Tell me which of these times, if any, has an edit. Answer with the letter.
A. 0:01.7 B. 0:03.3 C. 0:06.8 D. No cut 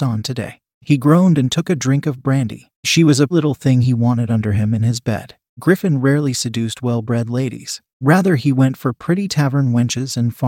B